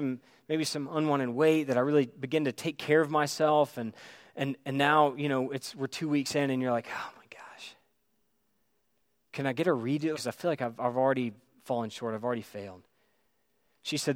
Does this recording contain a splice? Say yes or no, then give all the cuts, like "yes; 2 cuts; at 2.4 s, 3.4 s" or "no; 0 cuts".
yes; 1 cut; at 10.1 s